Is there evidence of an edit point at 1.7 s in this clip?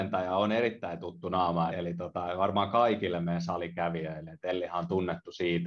yes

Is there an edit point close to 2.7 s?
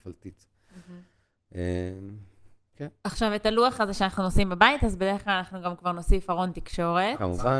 no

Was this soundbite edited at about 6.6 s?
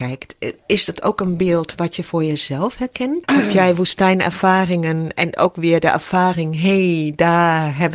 no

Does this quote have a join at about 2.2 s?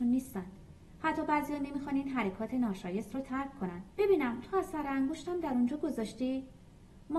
no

